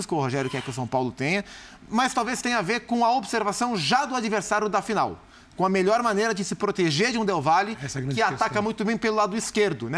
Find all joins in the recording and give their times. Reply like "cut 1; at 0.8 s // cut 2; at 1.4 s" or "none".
none

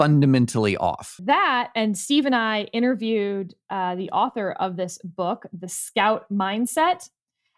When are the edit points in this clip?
cut 1; at 1.2 s

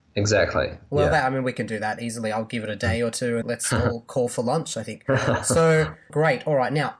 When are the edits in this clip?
cut 1; at 3.4 s

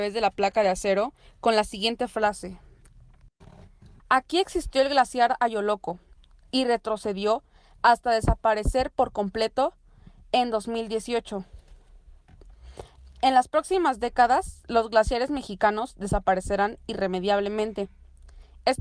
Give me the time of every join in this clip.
cut 1; at 4.0 s

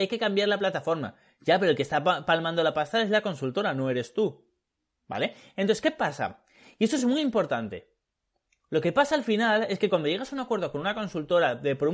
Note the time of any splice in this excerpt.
none

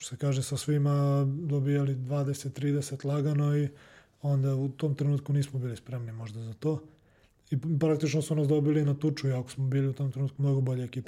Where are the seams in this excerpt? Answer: none

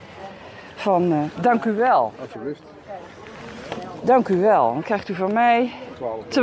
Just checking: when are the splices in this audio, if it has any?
cut 1; at 1.3 s

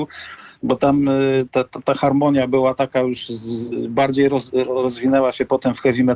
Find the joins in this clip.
none

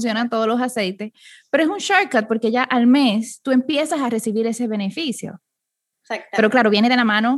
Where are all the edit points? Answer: none

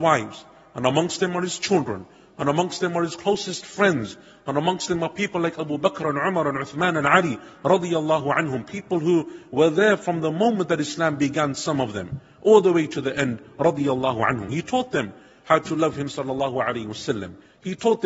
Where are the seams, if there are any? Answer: none

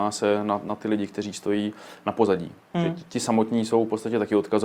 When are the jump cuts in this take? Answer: none

